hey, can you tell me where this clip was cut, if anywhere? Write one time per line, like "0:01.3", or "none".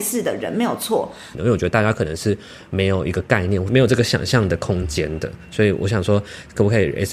0:01.3

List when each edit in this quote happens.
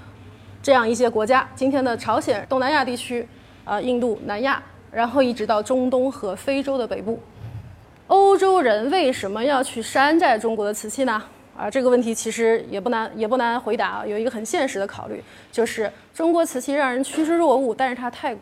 0:02.4

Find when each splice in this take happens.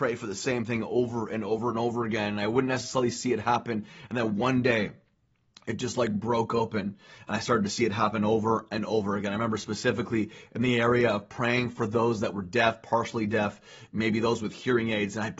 none

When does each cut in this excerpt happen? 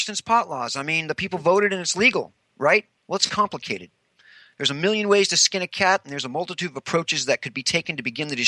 none

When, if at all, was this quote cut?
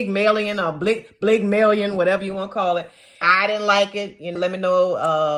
0:03.2
0:04.4

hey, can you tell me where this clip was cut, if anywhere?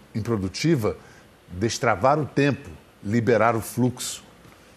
0:01.3

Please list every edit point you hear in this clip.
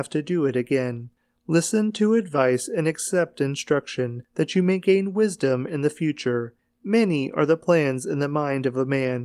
none

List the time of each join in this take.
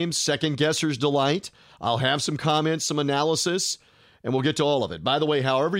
none

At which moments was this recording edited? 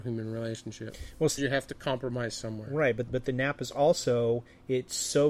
0:01.4
0:03.1

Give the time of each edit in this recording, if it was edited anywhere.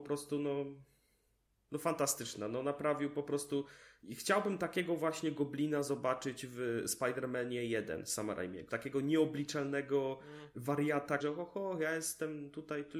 0:08.7
0:11.2

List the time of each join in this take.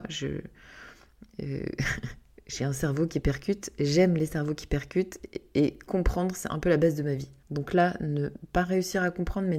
0:07.4

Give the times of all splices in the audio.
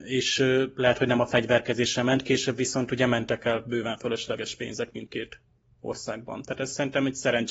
none

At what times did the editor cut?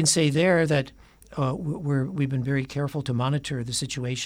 none

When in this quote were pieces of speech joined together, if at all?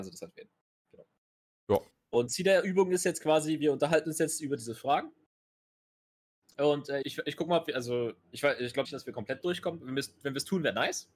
0:07.0
0:08.8

